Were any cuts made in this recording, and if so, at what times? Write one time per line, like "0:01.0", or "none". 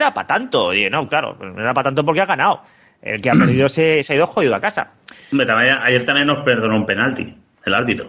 none